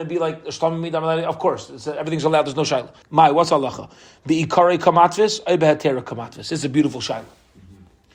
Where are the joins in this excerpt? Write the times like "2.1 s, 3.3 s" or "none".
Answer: 3.0 s

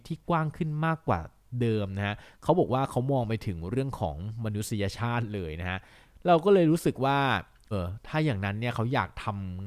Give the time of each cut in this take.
7.7 s

